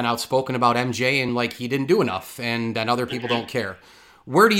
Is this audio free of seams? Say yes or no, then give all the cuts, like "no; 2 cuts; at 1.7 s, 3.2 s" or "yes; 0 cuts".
yes; 0 cuts